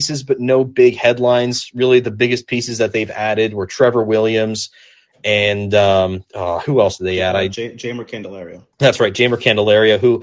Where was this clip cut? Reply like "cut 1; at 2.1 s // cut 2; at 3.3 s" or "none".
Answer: cut 1; at 8.7 s